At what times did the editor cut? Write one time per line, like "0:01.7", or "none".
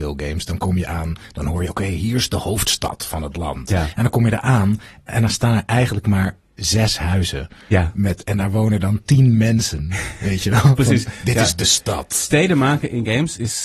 none

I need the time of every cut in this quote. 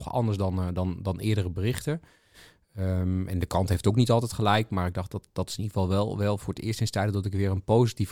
none

